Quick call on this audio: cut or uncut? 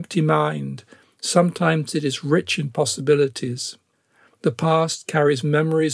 uncut